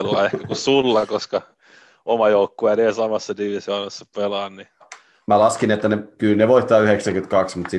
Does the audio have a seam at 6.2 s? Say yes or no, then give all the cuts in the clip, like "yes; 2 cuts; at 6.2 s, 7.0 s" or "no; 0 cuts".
no; 1 cut; at 4.8 s